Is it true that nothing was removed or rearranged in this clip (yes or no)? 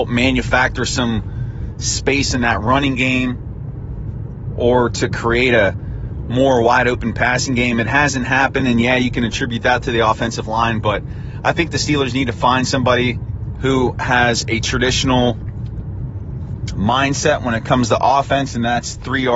yes